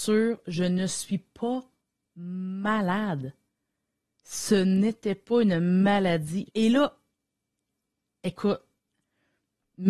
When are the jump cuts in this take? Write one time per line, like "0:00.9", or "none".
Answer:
0:06.5